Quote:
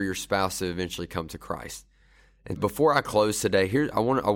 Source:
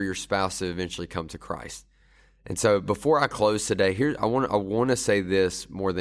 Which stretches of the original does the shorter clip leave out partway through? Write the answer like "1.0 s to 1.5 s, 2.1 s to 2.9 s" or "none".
2.6 s to 2.8 s